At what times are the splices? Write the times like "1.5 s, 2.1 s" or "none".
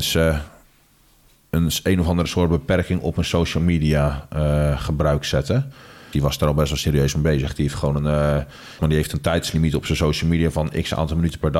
6.1 s, 8.8 s